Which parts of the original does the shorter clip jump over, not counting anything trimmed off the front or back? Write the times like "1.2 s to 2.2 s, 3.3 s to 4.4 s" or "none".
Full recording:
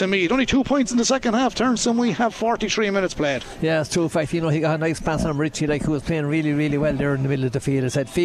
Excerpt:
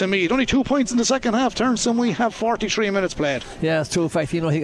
none